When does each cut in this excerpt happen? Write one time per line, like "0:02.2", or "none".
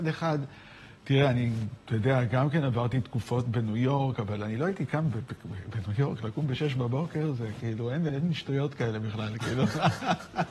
0:08.1